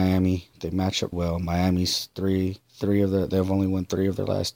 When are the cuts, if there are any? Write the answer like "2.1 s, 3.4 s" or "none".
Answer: 1.1 s, 2.6 s